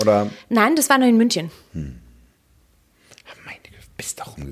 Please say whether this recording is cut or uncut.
uncut